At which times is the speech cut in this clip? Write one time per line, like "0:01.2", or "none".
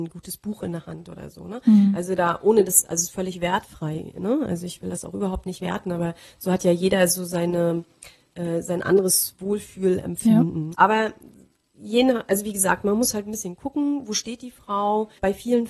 0:10.7